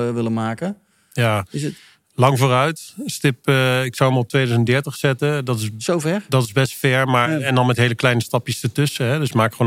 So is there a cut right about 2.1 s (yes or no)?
no